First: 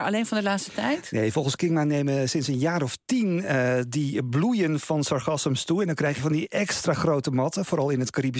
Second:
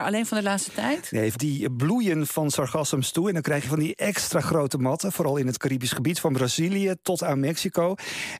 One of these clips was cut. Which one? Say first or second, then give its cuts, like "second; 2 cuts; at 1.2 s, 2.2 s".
second; 1 cut; at 1.3 s